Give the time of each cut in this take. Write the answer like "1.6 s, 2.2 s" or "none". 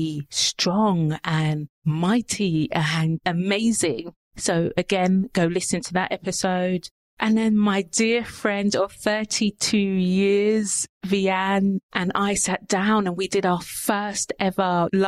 none